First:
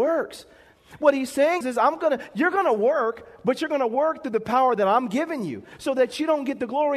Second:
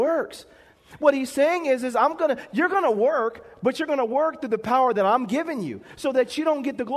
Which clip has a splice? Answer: first; 1 cut; at 1.6 s

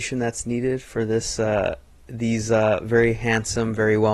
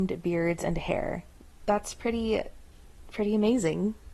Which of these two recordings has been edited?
second; 1 cut; at 1.6 s

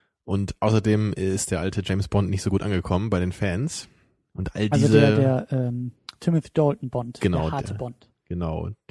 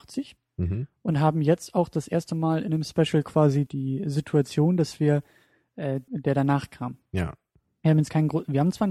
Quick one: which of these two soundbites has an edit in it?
second; 2 cuts; at 3.7 s, 6.1 s

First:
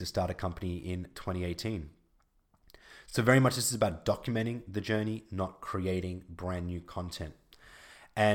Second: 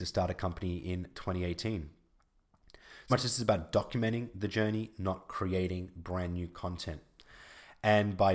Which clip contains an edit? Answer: second; 1 cut; at 3.1 s

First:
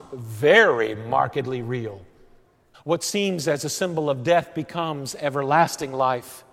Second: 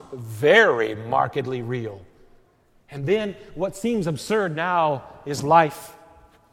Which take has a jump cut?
first; 1 cut; at 2.7 s

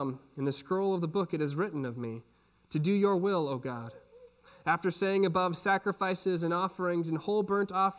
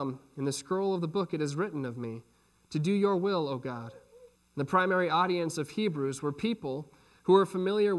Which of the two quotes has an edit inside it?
second; 1 cut; at 4.4 s

